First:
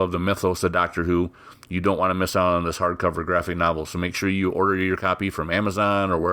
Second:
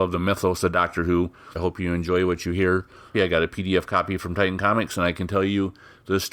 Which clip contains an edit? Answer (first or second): second